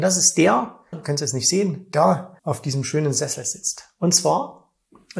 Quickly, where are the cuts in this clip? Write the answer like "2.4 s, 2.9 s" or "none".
0.9 s, 2.4 s